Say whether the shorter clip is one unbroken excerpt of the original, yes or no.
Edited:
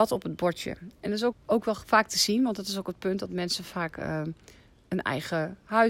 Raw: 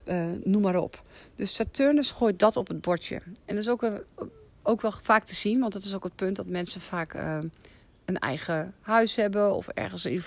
no